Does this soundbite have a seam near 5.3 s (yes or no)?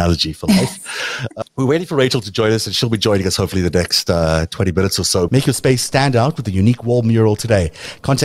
yes